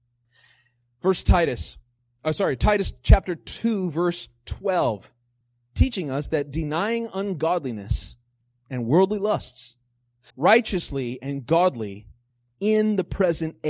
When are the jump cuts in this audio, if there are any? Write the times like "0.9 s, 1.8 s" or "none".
10.3 s